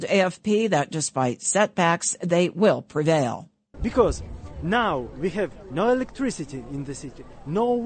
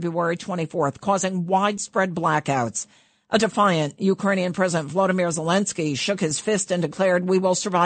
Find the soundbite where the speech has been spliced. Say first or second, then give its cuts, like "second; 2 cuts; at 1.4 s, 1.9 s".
first; 1 cut; at 3.7 s